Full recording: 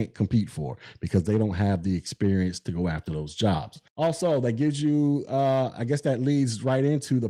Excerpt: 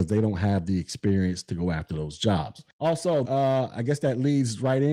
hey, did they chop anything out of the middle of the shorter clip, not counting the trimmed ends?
yes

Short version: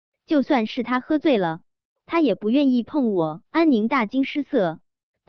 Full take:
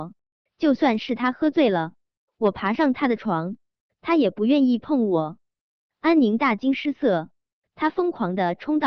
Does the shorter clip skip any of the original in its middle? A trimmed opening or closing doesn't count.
yes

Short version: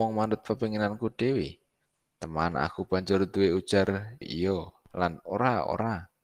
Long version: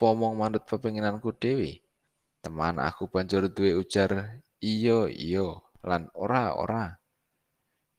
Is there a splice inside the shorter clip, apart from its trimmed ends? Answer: yes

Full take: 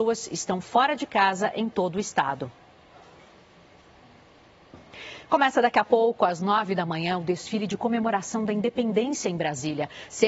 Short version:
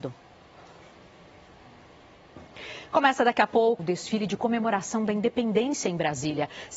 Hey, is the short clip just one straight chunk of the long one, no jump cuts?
no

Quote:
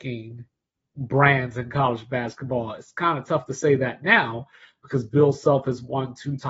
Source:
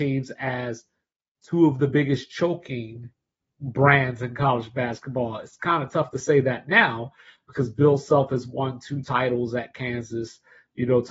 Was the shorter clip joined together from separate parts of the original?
no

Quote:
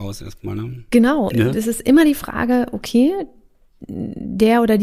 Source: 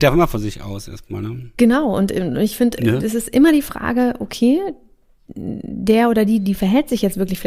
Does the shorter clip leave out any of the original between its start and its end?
yes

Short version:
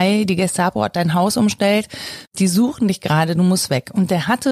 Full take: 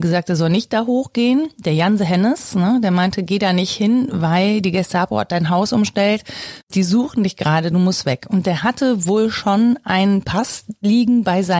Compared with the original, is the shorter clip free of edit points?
yes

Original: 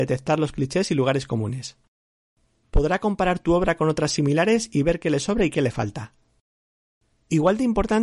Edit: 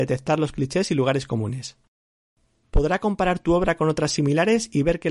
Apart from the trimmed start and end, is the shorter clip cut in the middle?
no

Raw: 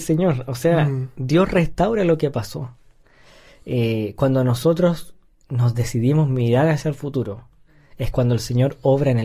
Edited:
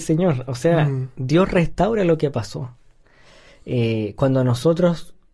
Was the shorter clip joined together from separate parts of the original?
no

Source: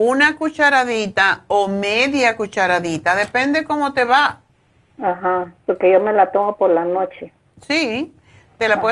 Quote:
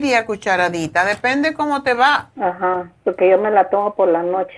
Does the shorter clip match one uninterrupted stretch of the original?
no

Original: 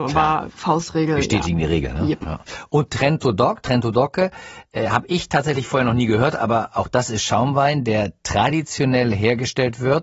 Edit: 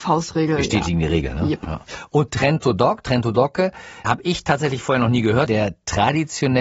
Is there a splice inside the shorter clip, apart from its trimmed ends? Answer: yes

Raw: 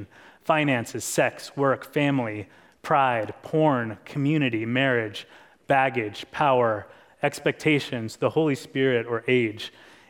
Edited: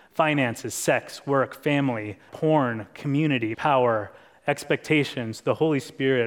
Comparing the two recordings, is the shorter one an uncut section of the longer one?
no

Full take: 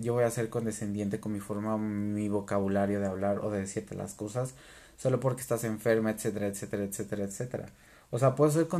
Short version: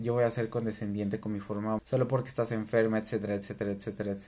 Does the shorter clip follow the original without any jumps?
no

